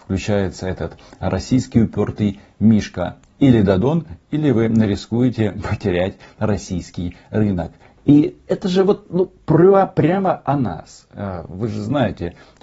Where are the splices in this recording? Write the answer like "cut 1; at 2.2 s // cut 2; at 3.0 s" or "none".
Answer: none